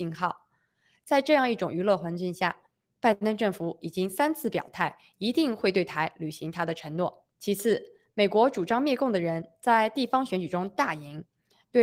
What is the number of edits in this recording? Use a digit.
1